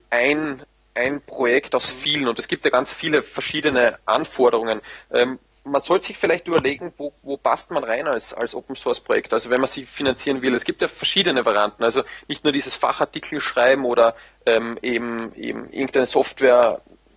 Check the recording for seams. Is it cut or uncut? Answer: uncut